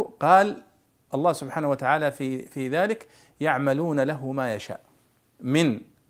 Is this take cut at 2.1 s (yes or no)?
no